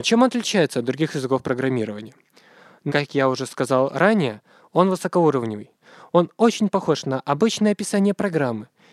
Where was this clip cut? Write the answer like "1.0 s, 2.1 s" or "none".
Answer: 2.9 s

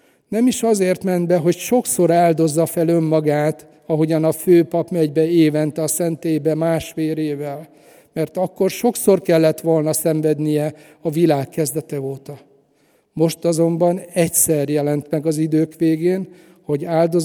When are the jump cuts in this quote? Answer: none

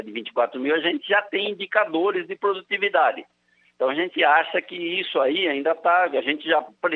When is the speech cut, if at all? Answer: 3.6 s

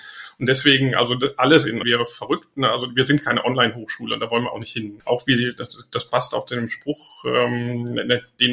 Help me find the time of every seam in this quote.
1.8 s, 5.0 s

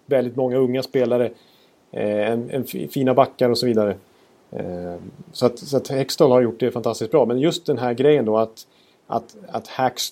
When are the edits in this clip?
none

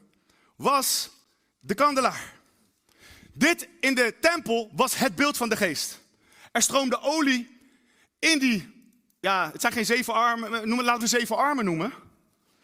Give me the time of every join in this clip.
11.0 s

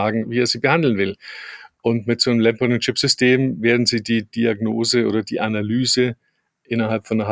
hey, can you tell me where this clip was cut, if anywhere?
none

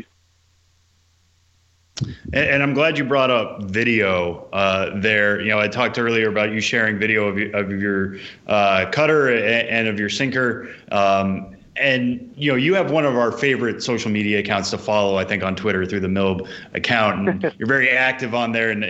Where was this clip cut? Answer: none

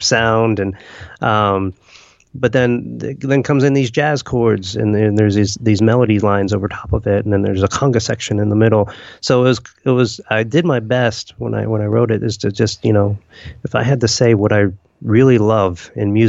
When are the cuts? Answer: none

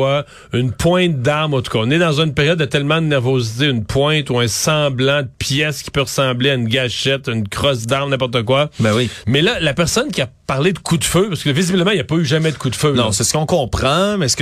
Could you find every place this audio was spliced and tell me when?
9.2 s

